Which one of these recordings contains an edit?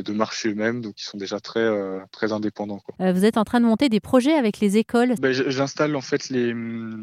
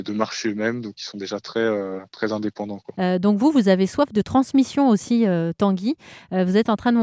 first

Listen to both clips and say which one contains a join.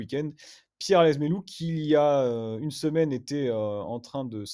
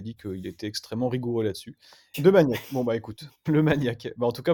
second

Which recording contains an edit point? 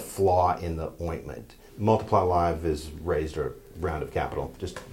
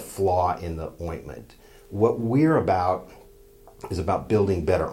first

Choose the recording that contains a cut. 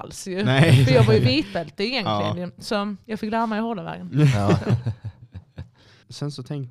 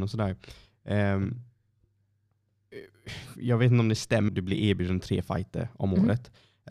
second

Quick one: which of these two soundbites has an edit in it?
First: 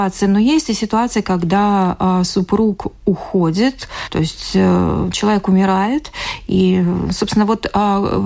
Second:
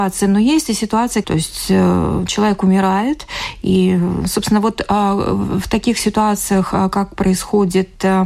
second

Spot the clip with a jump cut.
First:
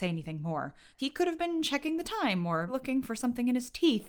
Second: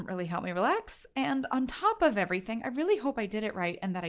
first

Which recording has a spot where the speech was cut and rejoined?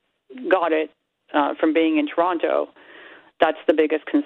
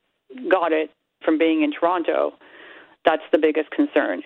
second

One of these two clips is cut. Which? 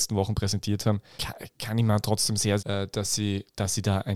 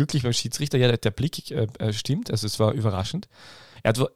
first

